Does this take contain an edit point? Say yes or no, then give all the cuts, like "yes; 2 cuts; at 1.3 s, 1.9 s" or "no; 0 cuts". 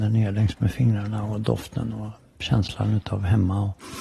no; 0 cuts